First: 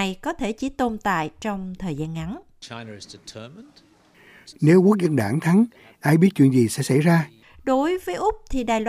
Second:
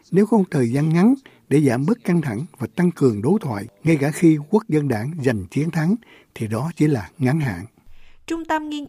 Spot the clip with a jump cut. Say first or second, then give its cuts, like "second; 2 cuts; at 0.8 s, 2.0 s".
first; 2 cuts; at 4.5 s, 7.4 s